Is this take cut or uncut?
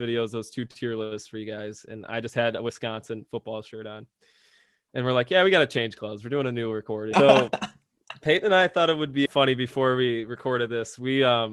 cut